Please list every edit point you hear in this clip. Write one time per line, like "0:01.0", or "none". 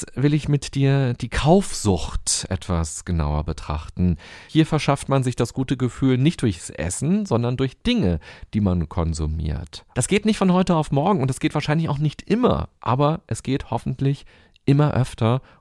0:09.9
0:12.8

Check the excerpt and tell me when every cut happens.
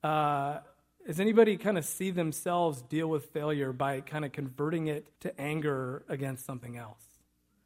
0:05.1

